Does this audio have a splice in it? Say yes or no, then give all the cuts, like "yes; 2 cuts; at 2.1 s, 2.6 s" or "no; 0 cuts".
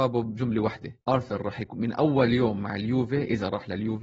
yes; 1 cut; at 1.0 s